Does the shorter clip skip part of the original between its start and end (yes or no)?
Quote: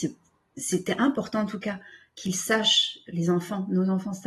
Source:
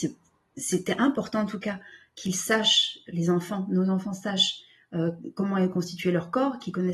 no